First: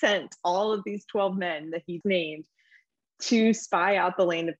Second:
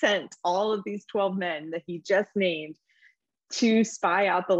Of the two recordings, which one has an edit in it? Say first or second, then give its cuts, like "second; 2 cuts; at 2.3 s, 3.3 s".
first; 1 cut; at 2.0 s